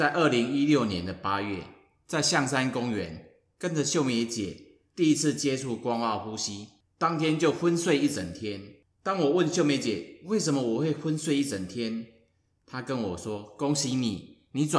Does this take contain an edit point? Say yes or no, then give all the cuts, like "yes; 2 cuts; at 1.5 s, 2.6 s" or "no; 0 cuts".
no; 0 cuts